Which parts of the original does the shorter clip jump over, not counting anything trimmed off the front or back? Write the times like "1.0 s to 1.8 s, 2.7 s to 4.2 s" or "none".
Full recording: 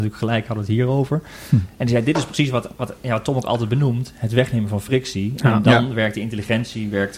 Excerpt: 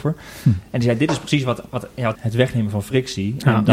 3.2 s to 4.1 s